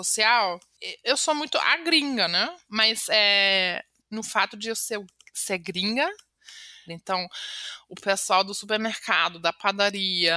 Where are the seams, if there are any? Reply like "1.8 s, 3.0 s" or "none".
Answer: 2.6 s, 4.0 s, 6.9 s